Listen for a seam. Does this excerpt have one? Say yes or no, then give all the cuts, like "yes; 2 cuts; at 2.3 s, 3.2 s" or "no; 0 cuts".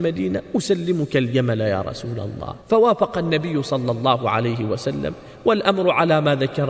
yes; 1 cut; at 2.6 s